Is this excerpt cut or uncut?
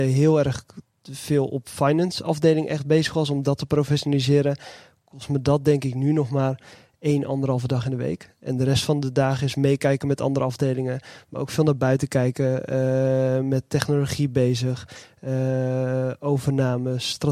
uncut